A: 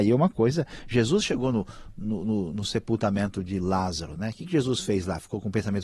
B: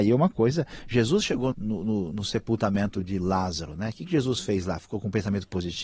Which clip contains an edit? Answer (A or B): B